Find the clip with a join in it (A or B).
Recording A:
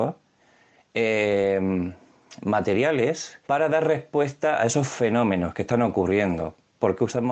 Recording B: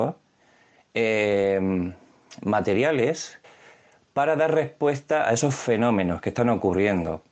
A